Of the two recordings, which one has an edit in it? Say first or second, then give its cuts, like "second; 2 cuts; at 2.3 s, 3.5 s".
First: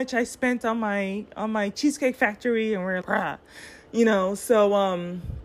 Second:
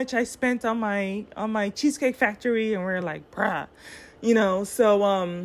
first; 1 cut; at 3.0 s